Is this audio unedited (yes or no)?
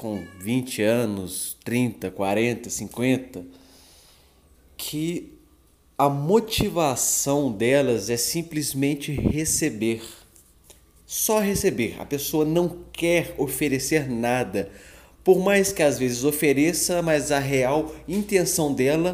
yes